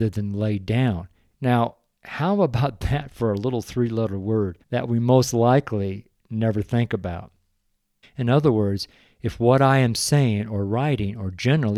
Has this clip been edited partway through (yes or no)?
yes